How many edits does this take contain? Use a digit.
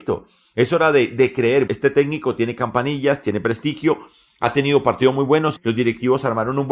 2